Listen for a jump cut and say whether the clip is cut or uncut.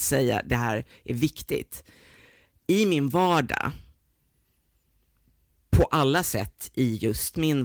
uncut